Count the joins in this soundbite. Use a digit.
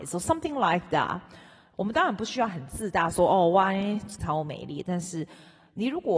2